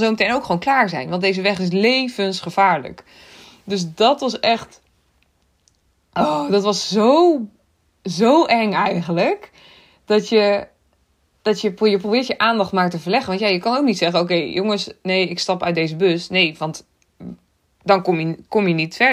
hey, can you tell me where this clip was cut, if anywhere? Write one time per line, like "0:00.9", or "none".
none